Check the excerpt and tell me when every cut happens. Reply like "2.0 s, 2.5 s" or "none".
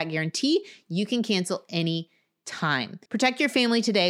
3.1 s